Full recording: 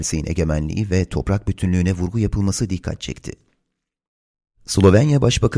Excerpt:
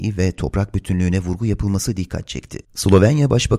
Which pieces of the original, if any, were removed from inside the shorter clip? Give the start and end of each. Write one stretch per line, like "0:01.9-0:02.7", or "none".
0:03.4-0:04.6